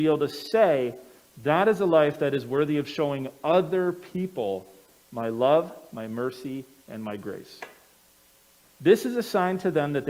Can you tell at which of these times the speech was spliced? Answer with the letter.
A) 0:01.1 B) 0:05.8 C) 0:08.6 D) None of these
C